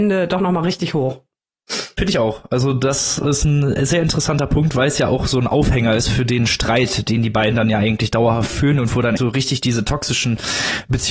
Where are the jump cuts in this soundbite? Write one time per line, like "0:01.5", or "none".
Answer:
0:09.2